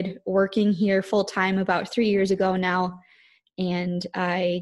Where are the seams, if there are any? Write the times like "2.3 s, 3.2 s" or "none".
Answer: none